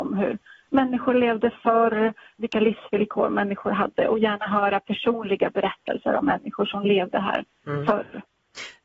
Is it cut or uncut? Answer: cut